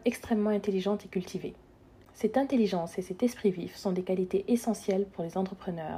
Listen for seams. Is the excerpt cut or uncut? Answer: cut